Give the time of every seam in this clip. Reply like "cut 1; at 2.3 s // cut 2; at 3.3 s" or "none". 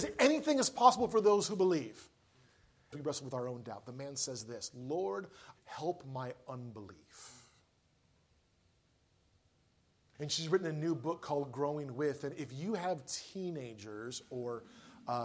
cut 1; at 2.9 s // cut 2; at 5.6 s // cut 3; at 10.1 s